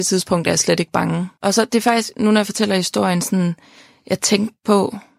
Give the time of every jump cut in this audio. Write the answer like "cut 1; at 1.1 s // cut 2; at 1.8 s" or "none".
cut 1; at 1.4 s